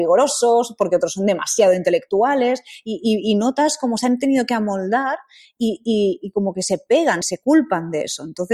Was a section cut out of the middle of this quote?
yes; 1 cut; at 7.2 s

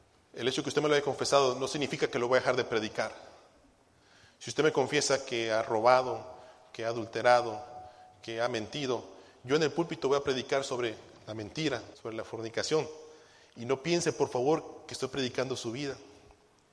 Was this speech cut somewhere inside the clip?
yes; 1 cut; at 11.9 s

